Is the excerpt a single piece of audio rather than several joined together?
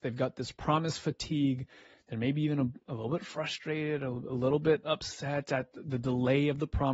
yes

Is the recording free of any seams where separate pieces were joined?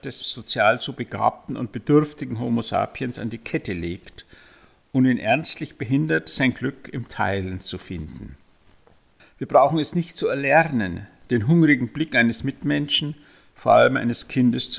yes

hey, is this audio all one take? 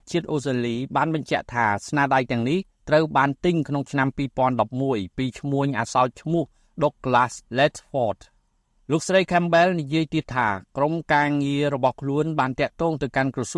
yes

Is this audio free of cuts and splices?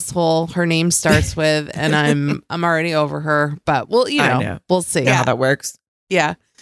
no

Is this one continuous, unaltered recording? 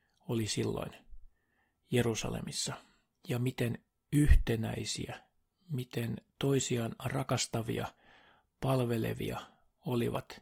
yes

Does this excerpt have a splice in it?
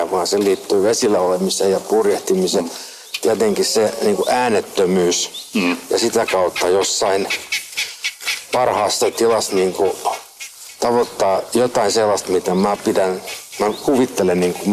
no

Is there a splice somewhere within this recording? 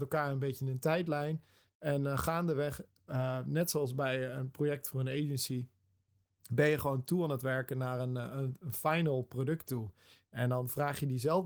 no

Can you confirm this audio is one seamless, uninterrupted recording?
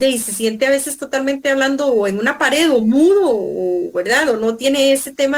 yes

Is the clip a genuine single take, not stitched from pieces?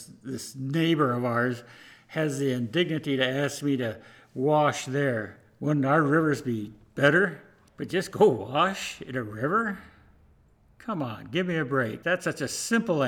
no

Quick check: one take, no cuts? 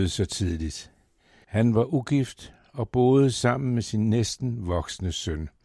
no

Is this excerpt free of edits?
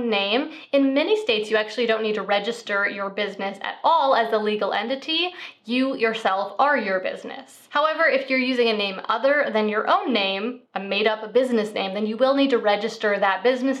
yes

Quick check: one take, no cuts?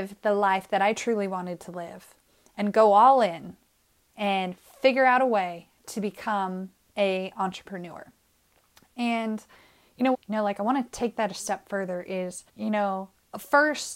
no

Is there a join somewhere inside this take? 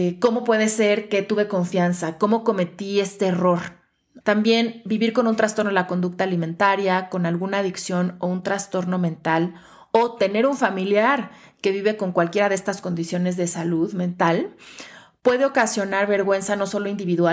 yes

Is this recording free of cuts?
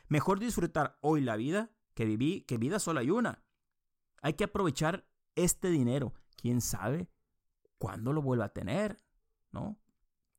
yes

